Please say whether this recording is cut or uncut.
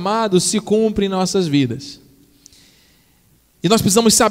uncut